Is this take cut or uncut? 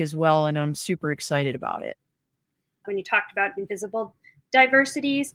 uncut